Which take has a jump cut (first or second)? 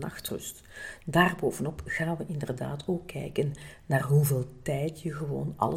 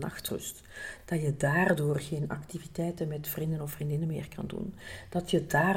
first